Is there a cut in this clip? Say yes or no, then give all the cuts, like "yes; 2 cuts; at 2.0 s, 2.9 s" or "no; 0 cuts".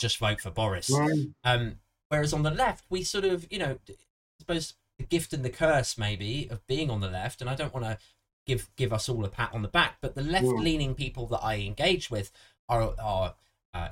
no; 0 cuts